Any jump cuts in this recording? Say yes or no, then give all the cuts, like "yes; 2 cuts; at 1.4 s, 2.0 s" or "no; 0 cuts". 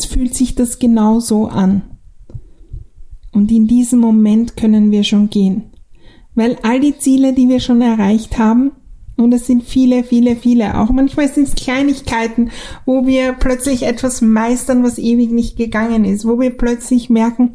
no; 0 cuts